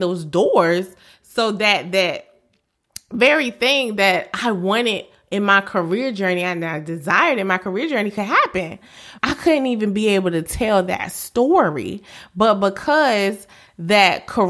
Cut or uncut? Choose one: cut